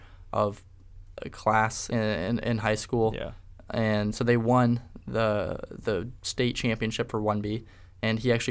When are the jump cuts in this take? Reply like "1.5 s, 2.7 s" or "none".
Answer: 1.9 s